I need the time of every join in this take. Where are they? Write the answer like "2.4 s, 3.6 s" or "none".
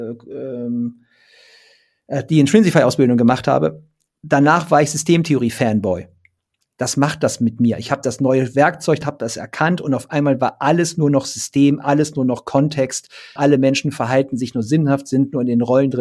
9.0 s, 13.4 s